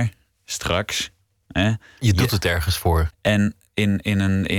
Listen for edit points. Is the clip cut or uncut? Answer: cut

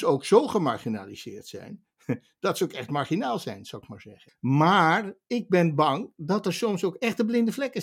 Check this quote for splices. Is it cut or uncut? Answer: cut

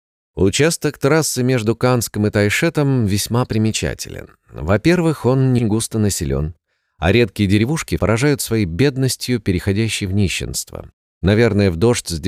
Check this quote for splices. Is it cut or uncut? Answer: cut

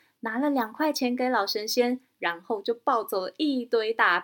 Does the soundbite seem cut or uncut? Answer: uncut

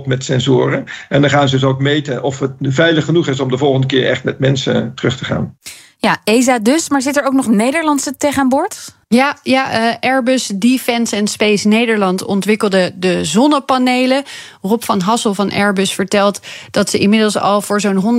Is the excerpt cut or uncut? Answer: cut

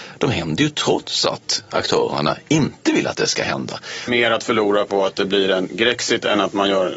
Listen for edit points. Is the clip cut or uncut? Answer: cut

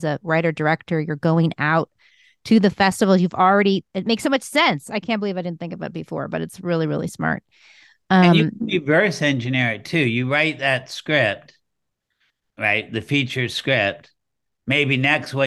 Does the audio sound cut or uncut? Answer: uncut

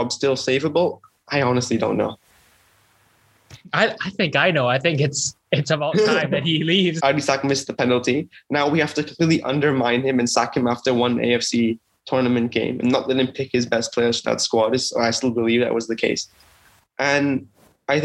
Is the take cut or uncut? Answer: cut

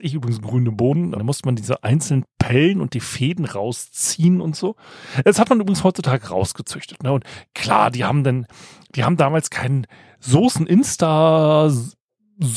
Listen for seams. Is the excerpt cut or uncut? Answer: cut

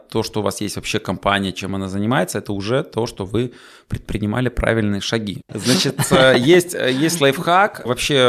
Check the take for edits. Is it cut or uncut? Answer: cut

